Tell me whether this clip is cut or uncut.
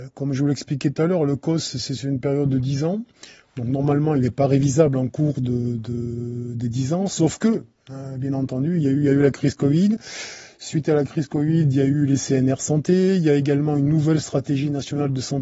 uncut